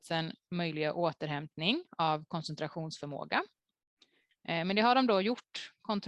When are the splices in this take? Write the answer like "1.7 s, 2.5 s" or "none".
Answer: 4.3 s